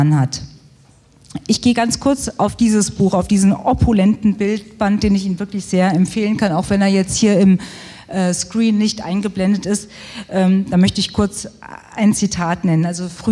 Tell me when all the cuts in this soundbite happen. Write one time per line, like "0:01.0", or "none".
none